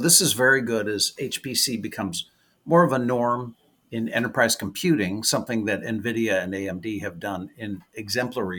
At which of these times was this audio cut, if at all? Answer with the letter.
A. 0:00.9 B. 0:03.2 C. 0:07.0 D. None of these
D